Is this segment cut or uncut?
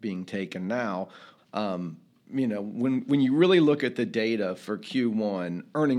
cut